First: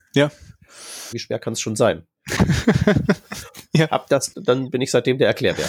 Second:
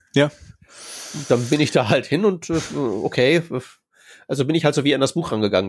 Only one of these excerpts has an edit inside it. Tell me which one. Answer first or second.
first